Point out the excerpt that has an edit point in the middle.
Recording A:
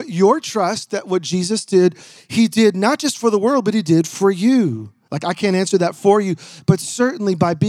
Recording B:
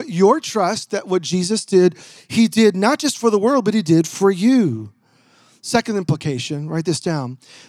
A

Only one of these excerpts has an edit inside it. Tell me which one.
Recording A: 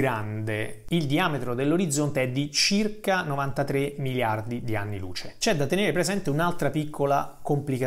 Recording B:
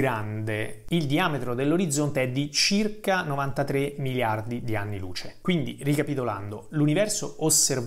A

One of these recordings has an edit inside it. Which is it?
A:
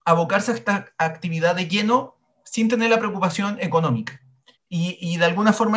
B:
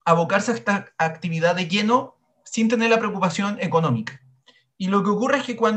A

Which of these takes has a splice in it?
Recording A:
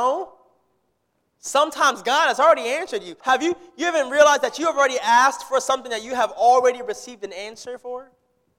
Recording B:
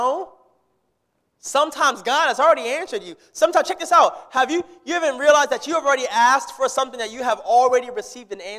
A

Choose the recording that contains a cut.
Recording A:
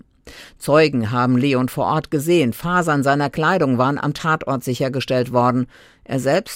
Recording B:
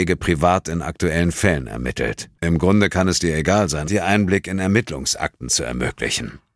B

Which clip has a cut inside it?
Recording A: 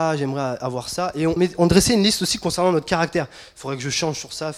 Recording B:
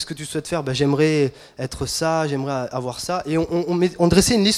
A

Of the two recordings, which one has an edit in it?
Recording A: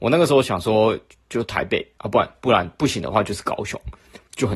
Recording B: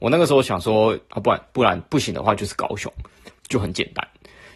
B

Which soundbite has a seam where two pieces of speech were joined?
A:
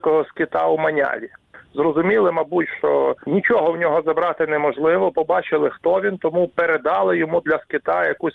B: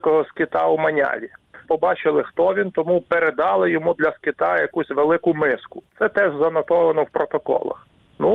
B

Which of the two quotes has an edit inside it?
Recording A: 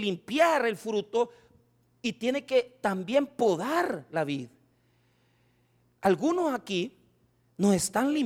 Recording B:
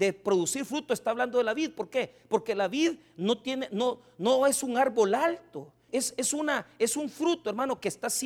B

